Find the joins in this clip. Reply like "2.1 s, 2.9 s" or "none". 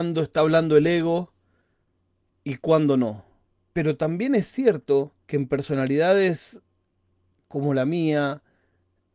3.6 s, 5.2 s